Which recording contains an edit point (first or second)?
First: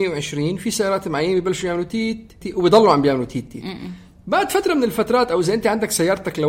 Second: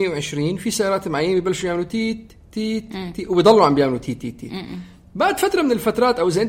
first